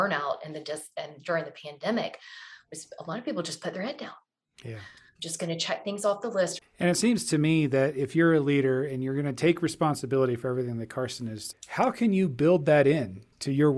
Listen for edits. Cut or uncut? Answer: cut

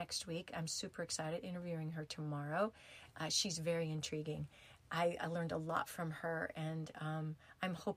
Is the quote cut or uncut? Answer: uncut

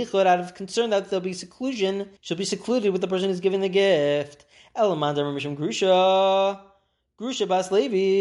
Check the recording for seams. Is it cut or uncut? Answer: cut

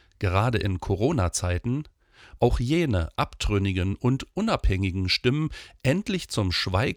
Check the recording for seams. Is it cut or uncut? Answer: cut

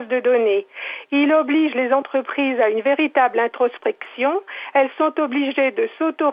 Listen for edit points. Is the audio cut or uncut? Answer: uncut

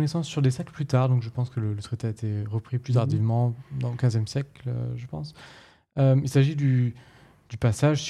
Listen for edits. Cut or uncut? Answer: uncut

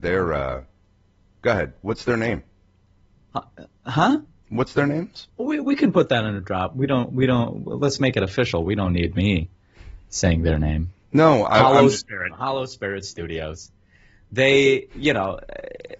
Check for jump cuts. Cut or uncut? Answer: cut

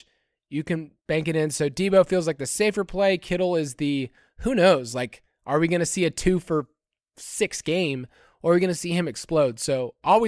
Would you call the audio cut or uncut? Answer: uncut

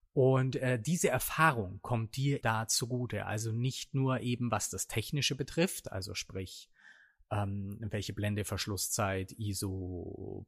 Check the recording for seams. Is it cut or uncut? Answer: cut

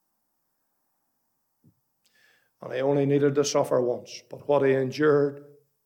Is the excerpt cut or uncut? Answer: uncut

